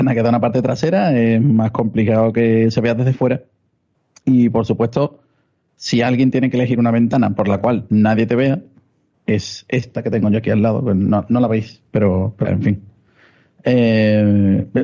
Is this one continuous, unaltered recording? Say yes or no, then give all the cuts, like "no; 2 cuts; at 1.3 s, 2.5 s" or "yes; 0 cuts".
no; 1 cut; at 12.4 s